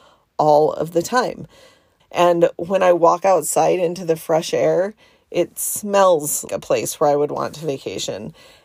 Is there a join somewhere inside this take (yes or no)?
yes